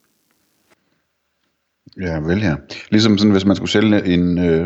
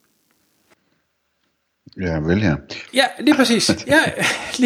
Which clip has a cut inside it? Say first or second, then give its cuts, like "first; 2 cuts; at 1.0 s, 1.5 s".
second; 1 cut; at 2.9 s